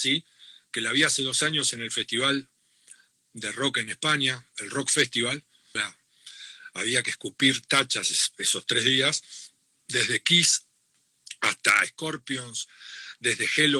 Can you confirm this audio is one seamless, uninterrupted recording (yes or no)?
no